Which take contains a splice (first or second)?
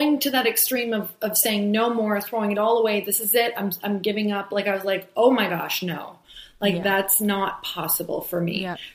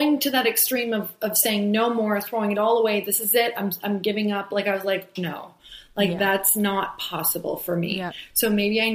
second